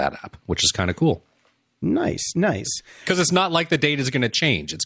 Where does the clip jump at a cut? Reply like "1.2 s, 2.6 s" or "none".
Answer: none